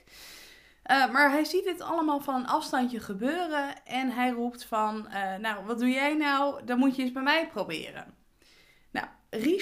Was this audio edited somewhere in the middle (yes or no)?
no